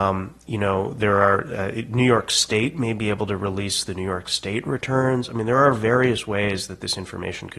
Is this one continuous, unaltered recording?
yes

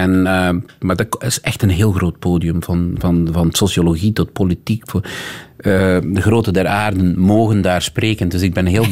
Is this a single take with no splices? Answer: yes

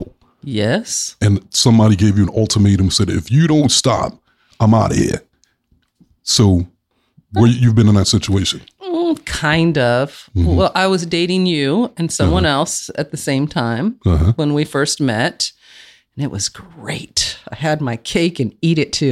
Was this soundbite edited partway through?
no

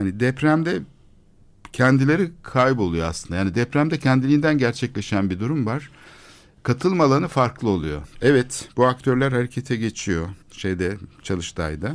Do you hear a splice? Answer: yes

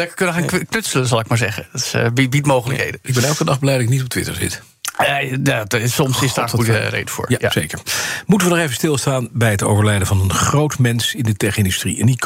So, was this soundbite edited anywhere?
no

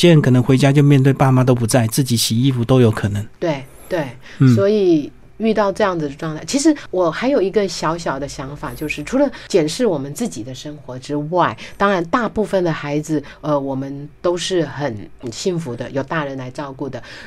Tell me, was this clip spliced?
no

